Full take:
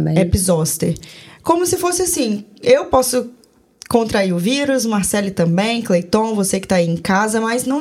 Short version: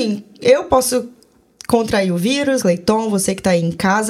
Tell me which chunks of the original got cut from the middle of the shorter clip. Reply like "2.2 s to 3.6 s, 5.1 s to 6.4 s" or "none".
4.8 s to 5.8 s